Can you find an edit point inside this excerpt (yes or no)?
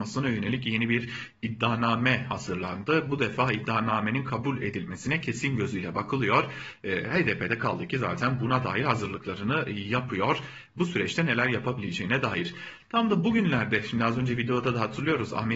no